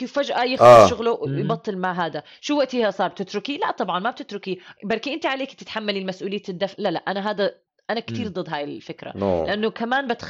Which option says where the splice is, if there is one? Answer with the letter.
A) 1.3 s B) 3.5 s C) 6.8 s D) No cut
C